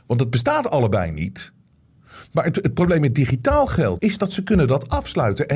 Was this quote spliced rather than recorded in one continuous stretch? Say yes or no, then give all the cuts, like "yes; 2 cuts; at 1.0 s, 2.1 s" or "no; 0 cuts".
yes; 1 cut; at 4.0 s